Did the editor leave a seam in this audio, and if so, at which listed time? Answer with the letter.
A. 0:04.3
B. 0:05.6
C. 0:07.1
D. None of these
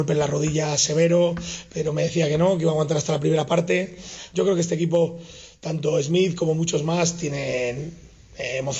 A